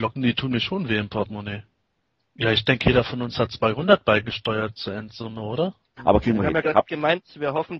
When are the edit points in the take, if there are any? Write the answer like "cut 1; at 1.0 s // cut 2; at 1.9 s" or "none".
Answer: cut 1; at 2.2 s // cut 2; at 6.0 s